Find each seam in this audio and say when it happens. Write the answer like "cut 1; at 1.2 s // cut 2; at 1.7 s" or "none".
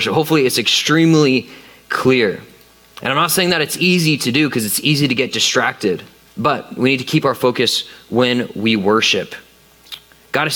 cut 1; at 6.3 s